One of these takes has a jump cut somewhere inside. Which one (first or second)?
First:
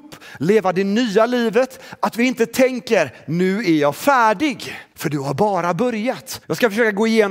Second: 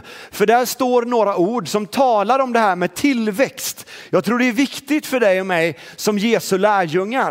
first